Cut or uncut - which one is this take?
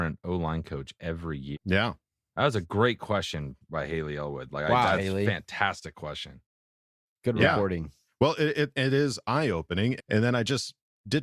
cut